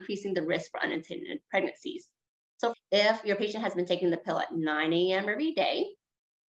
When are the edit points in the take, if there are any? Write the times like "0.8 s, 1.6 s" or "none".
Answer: 2.7 s